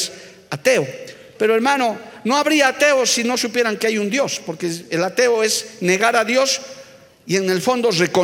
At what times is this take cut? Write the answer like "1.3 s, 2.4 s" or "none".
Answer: 1.3 s